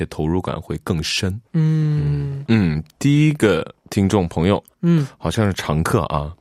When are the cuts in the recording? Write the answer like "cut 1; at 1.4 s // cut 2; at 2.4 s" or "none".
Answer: cut 1; at 2.5 s // cut 2; at 4.7 s